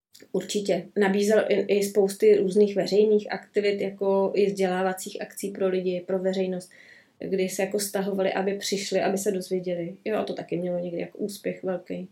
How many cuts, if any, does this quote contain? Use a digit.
0